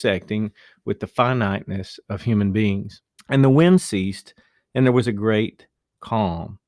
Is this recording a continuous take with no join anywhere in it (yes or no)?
no